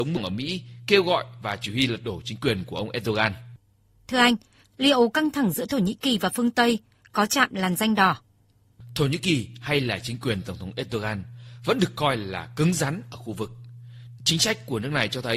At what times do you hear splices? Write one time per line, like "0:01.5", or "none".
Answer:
0:04.6
0:14.2

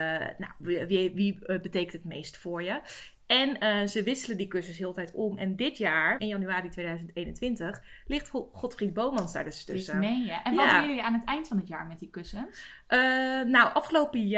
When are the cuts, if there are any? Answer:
0:06.2

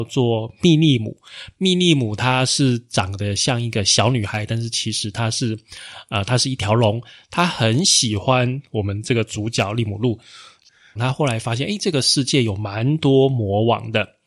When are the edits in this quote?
0:11.0

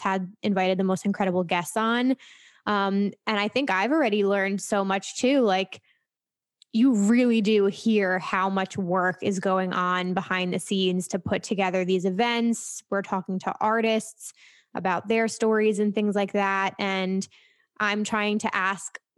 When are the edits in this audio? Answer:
none

